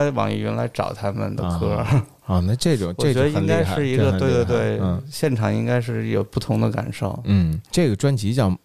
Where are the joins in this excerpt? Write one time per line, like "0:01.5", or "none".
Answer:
none